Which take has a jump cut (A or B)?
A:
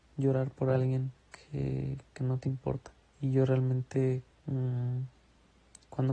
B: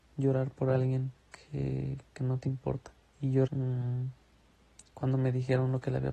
B